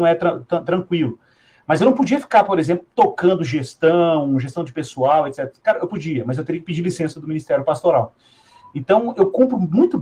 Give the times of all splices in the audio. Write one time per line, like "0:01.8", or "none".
none